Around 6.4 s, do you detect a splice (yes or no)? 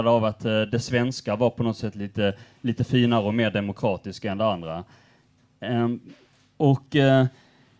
no